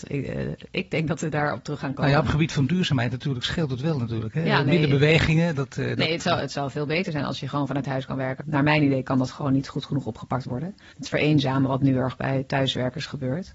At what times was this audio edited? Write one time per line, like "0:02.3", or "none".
0:08.4
0:10.9